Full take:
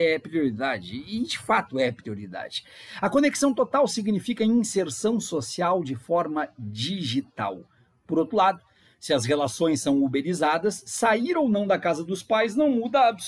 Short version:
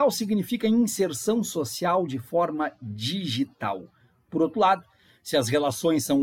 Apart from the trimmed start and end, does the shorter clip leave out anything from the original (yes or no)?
no